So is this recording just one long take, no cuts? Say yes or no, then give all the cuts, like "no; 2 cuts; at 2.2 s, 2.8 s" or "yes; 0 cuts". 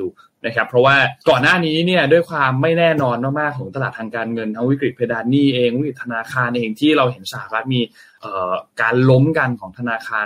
no; 1 cut; at 1.2 s